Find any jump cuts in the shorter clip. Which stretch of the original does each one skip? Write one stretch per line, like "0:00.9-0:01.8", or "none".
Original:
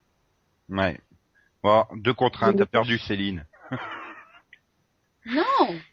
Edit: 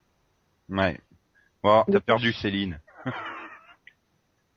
0:01.9-0:02.5